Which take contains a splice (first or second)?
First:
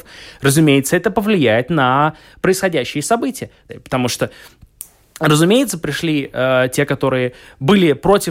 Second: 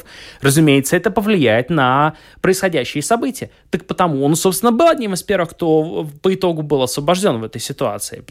first